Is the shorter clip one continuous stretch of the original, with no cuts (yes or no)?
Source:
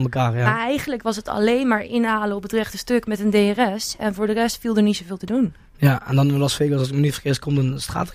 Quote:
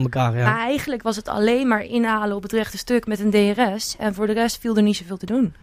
yes